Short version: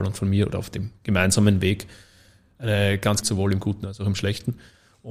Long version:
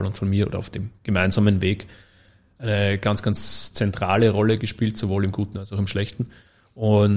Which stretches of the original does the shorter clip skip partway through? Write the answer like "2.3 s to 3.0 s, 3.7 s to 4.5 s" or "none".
3.2 s to 4.9 s